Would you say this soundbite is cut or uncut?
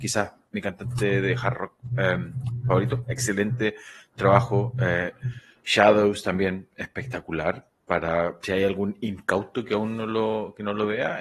uncut